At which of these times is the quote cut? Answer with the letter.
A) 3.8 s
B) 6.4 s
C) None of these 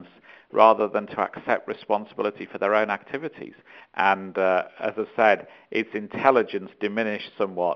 A